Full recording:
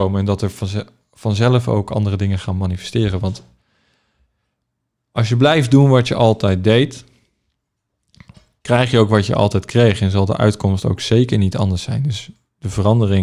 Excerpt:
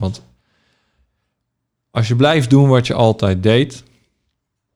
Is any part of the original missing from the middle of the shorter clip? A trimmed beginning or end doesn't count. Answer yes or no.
no